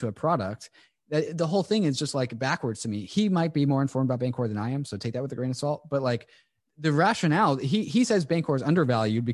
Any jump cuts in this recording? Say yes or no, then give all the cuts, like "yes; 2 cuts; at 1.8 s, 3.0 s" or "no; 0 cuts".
yes; 1 cut; at 1.3 s